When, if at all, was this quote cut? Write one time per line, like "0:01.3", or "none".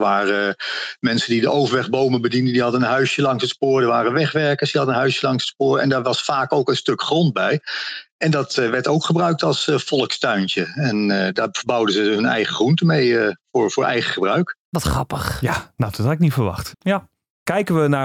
0:14.6
0:16.7